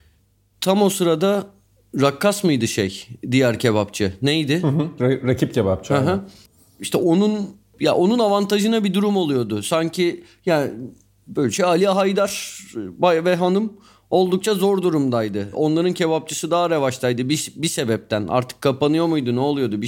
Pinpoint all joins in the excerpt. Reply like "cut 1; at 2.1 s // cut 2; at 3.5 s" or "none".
none